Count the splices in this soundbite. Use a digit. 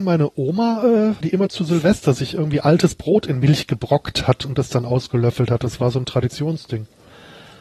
1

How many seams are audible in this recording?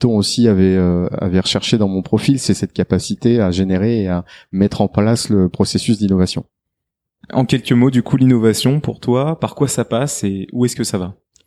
0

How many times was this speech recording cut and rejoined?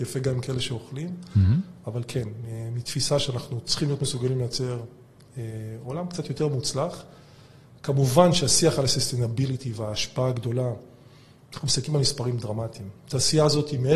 0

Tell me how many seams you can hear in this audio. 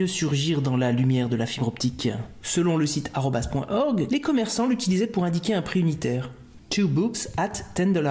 2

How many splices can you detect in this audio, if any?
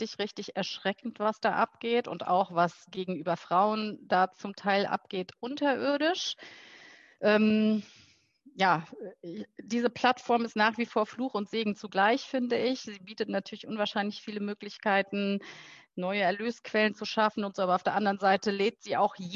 0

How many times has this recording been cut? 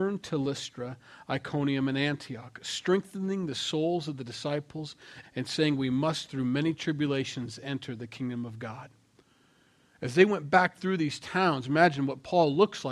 1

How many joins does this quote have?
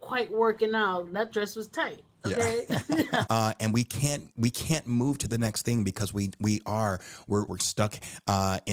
2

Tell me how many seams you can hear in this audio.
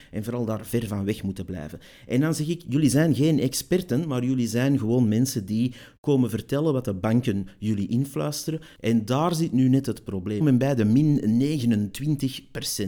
2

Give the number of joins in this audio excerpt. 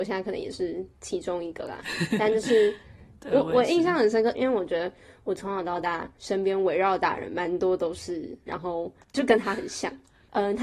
2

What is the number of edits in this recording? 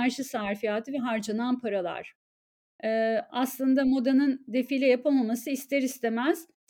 1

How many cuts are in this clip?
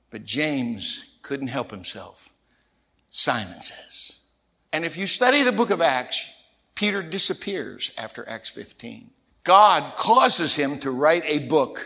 2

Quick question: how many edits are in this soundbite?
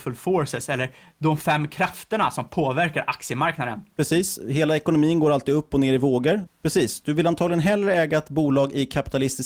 2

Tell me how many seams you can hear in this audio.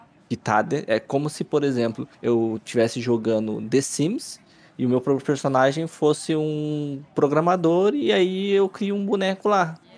1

